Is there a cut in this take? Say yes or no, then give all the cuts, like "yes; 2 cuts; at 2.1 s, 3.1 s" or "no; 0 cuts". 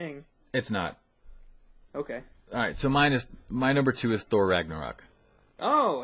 no; 0 cuts